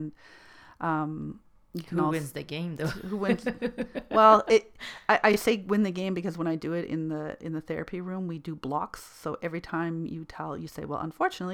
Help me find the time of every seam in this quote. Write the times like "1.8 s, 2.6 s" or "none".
none

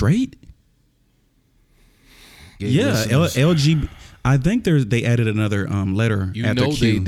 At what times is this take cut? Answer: 2.6 s

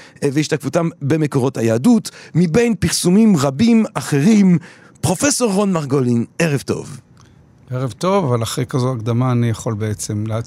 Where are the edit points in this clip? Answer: none

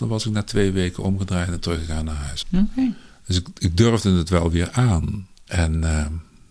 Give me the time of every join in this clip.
2.4 s, 5.5 s

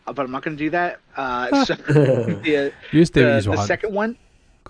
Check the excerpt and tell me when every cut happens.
none

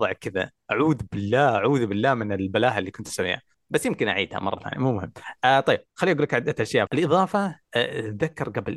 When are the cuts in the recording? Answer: 6.9 s

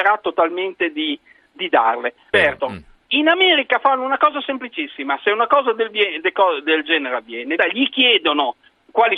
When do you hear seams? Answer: 2.3 s, 7.6 s

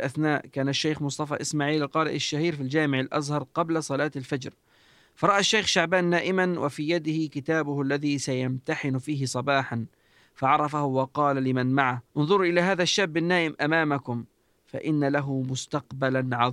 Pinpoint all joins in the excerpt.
12.1 s

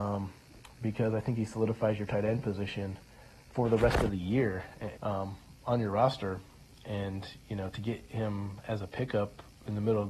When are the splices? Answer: 5.0 s

